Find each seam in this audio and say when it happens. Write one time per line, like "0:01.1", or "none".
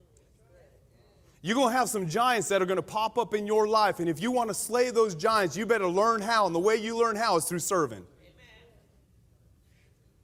none

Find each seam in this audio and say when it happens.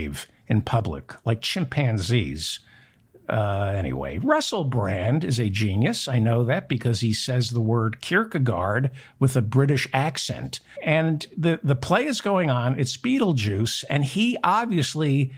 0:10.8

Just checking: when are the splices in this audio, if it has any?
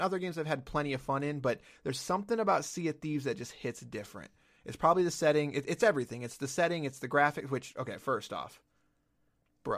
none

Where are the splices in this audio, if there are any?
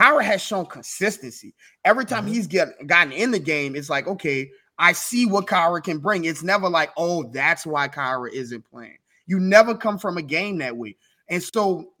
none

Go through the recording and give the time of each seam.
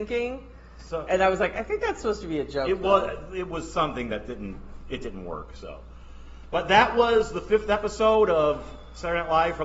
none

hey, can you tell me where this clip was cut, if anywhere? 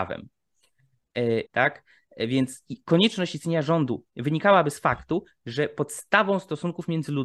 0:01.5
0:04.1

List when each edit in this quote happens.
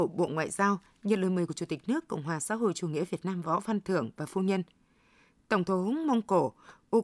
none

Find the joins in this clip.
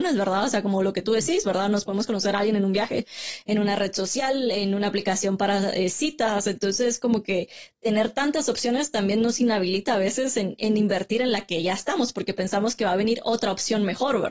none

